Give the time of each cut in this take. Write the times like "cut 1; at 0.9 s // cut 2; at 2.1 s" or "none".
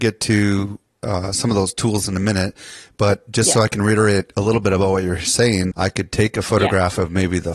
cut 1; at 5.7 s